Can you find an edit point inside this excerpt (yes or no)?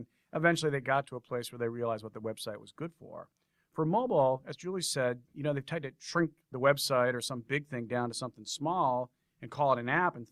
no